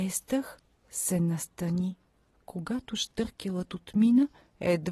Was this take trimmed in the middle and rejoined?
yes; 1 cut; at 2.3 s

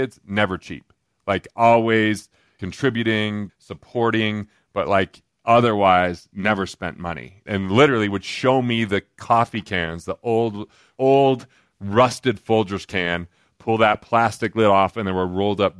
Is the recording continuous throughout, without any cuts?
no; 1 cut; at 3.5 s

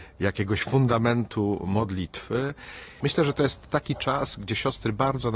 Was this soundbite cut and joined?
yes; 1 cut; at 3.0 s

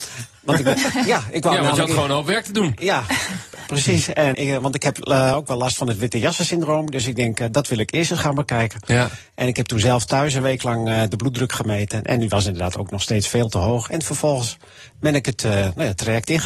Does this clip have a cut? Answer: yes; 1 cut; at 4.3 s

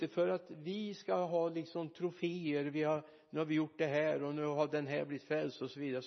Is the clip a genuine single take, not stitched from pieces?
yes; 0 cuts

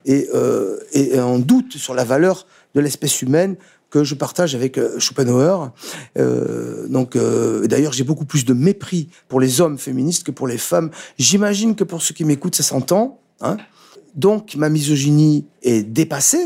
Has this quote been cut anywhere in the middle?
no; 0 cuts

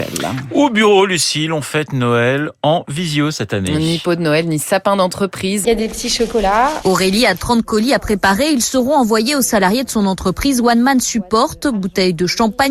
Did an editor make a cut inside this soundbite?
yes; 1 cut; at 5.6 s

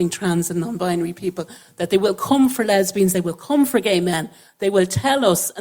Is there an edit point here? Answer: no; 0 cuts

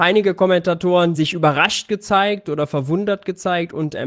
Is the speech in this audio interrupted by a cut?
yes; 1 cut; at 1.1 s

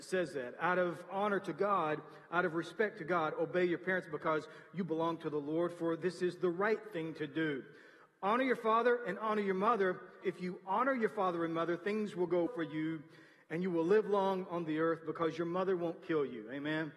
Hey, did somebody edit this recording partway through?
yes; 2 cuts; at 10.2 s, 12.5 s

